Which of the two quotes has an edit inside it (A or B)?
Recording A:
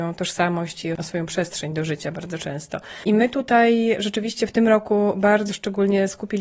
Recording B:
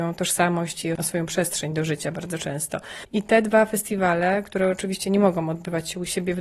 B